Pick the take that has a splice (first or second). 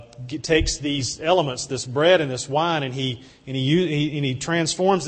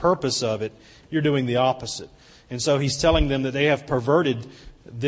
second